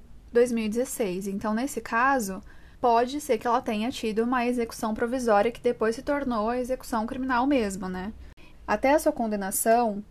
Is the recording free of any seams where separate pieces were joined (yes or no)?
no